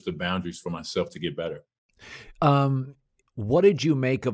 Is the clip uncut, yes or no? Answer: no